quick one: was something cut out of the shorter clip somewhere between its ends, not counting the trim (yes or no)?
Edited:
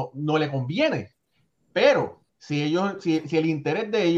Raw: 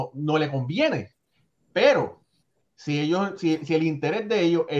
yes